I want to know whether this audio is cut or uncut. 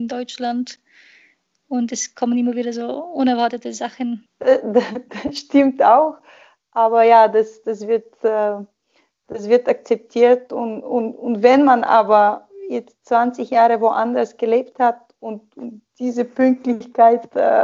uncut